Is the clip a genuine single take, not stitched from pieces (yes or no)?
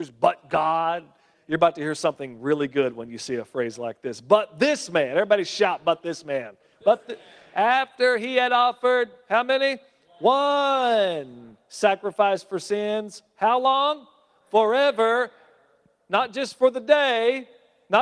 no